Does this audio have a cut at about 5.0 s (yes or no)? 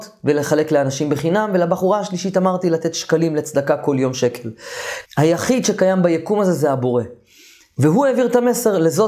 yes